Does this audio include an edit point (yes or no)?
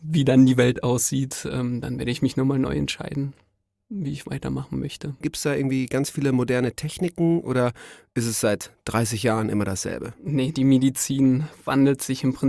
yes